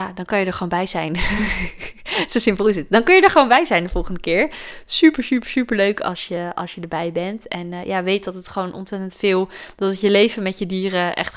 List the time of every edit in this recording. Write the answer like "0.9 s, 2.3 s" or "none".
none